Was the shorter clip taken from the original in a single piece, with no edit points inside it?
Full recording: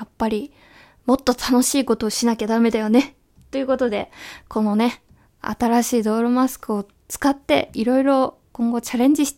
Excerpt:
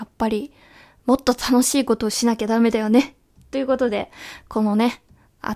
yes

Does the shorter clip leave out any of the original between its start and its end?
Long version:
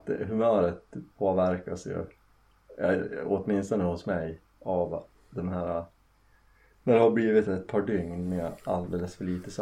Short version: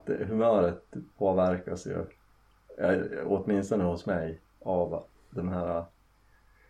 no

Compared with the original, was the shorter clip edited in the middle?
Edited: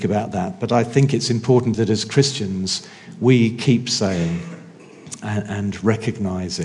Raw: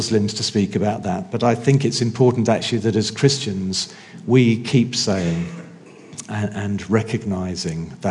yes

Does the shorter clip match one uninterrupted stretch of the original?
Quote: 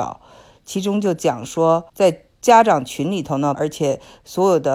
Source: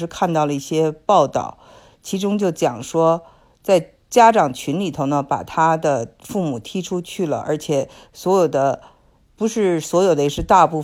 no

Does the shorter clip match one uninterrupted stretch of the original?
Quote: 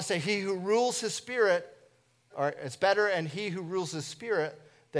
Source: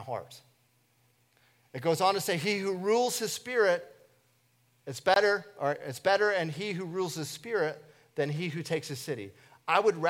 no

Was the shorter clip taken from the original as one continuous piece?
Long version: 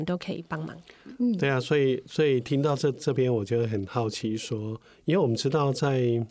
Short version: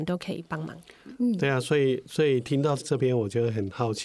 no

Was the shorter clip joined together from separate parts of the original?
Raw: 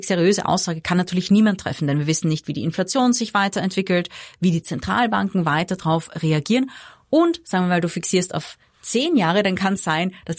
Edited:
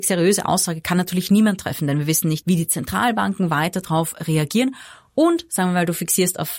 yes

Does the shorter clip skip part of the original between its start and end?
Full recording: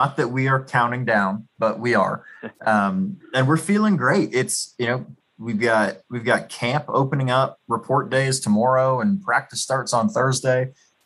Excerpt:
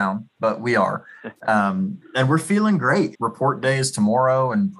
yes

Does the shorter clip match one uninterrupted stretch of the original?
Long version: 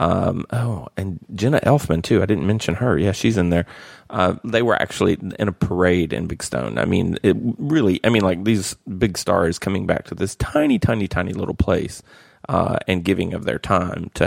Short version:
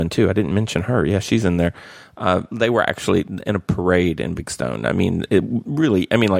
yes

